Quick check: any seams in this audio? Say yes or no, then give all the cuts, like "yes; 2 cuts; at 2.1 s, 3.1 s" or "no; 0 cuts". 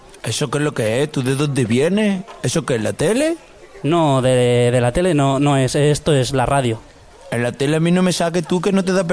no; 0 cuts